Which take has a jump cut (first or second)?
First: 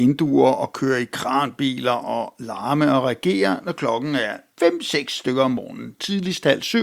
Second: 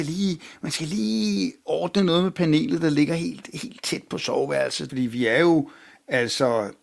second